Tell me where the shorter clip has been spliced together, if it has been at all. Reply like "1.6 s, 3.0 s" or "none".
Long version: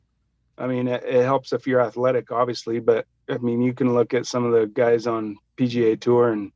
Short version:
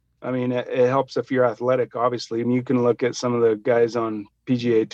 2.4 s

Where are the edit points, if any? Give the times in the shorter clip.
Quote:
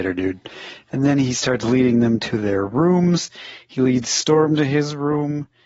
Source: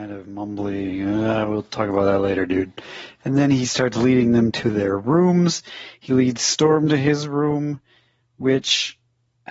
none

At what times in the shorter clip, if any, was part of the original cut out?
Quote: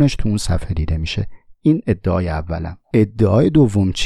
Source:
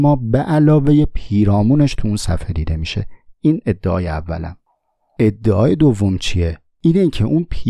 2.8 s

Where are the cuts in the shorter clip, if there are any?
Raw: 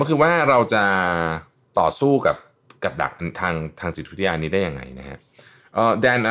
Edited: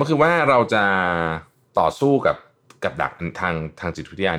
none

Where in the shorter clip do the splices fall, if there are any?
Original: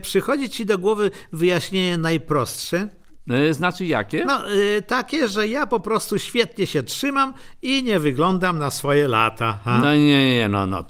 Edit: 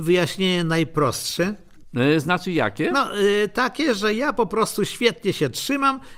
none

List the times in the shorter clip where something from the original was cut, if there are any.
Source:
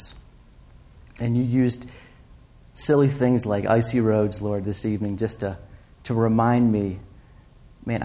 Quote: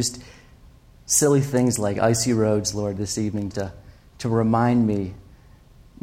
3.5 s

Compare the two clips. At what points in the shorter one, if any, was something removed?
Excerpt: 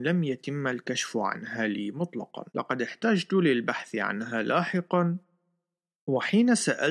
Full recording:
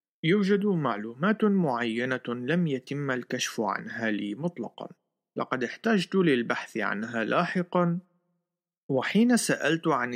2.5 s

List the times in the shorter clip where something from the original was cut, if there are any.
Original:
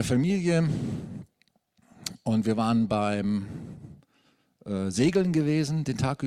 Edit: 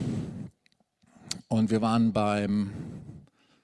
none

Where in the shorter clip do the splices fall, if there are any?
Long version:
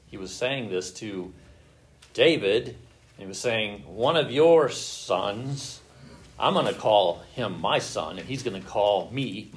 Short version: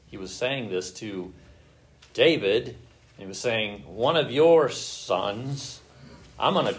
none

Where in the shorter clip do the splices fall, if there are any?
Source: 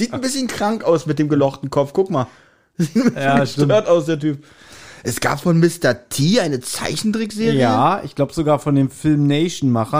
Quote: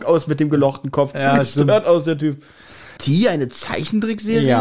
1.1 s, 3.0 s

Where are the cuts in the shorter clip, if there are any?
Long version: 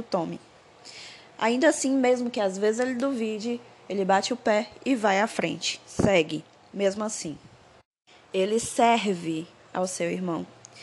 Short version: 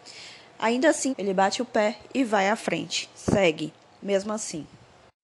1.1 s

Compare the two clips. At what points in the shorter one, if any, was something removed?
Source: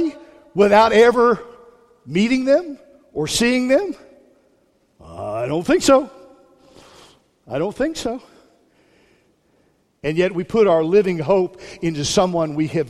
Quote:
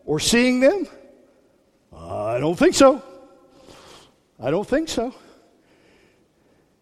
none

